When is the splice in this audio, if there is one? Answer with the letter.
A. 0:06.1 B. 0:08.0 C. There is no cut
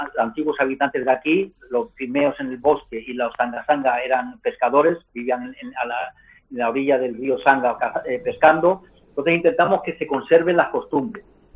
C